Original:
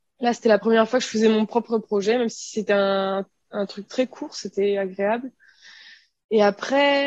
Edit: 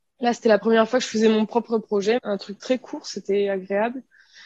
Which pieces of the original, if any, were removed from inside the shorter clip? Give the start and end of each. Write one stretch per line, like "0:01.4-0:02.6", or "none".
0:02.2-0:03.5